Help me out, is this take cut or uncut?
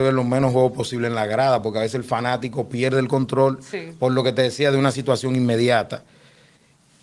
uncut